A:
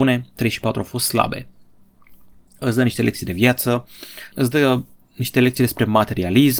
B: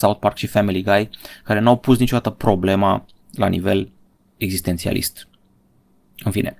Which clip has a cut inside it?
A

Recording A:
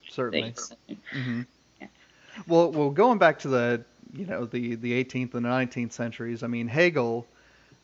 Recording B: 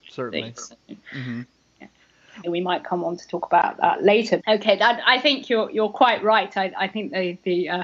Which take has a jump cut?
B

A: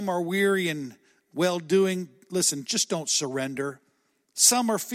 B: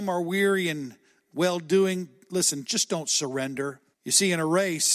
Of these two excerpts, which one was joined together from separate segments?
B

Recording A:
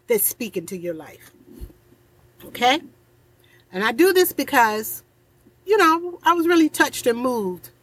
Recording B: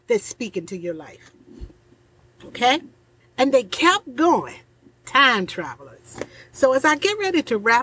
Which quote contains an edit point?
B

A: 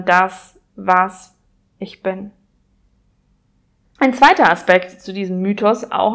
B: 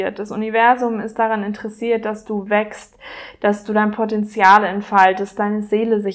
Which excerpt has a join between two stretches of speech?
A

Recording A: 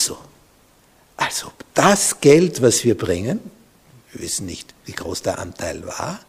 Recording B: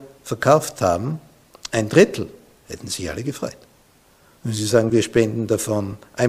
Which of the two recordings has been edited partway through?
A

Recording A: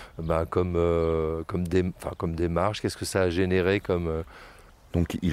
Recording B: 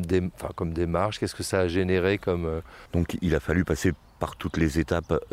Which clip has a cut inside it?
B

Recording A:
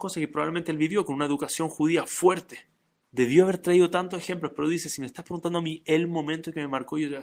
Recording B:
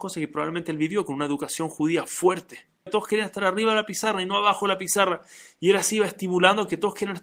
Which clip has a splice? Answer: B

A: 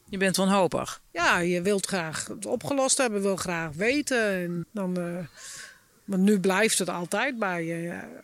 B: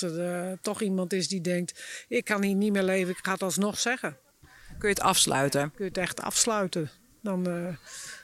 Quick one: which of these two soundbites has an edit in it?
A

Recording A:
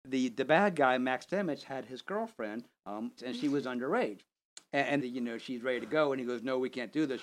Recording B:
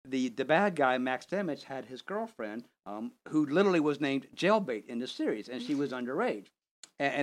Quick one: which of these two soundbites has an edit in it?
A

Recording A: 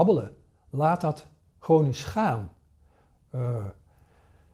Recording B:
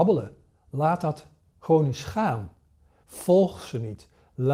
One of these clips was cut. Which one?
B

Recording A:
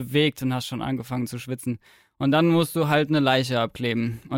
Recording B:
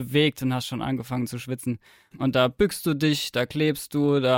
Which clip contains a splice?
B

